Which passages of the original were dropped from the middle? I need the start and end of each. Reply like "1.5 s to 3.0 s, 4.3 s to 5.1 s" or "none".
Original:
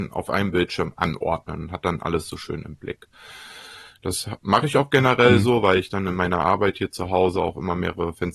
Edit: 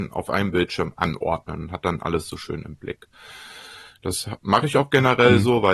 none